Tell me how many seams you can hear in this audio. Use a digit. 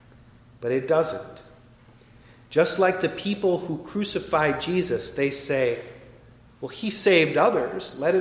0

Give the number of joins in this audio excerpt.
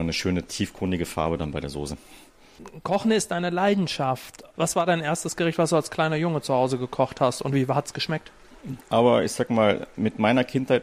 1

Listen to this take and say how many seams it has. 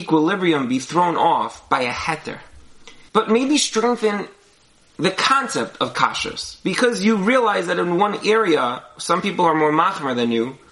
1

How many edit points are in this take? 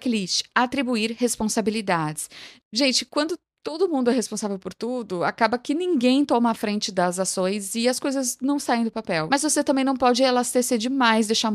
1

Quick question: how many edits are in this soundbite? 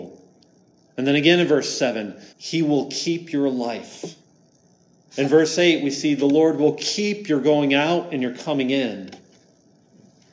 1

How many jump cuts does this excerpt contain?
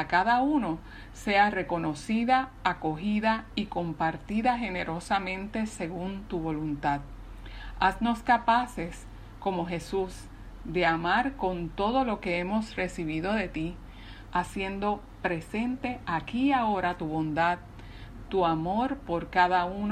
2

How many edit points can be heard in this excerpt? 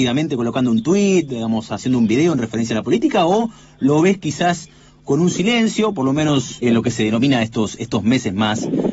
1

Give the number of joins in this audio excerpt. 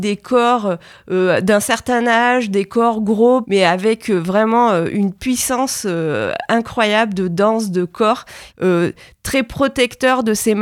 2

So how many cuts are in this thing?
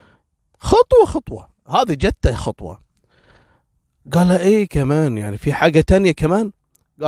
1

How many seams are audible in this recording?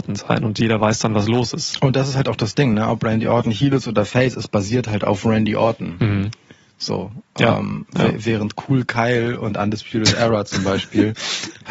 0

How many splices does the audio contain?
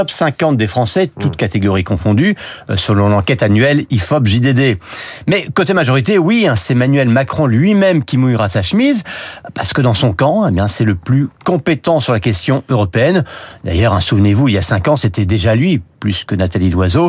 0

